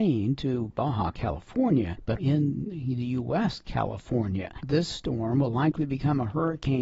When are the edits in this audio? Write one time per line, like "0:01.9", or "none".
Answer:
0:02.2
0:04.6